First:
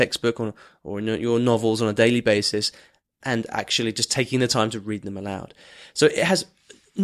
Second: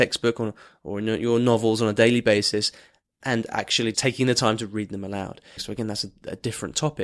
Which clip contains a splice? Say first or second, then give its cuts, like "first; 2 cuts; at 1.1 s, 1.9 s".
second; 2 cuts; at 3.9 s, 5.6 s